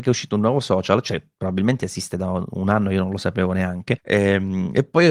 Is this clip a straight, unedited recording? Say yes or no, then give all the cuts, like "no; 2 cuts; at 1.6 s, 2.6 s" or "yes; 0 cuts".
no; 1 cut; at 4.0 s